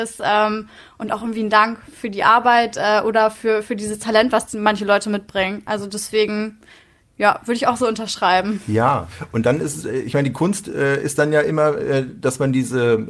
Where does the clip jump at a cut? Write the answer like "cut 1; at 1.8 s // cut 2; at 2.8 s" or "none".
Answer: none